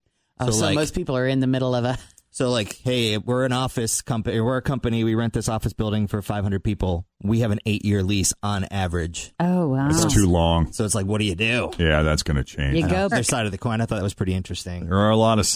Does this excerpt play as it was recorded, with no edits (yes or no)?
no